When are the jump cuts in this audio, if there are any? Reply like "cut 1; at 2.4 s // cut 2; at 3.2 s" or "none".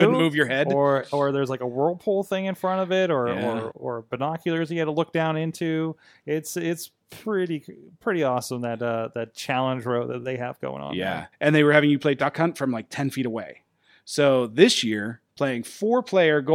cut 1; at 3.7 s // cut 2; at 11.3 s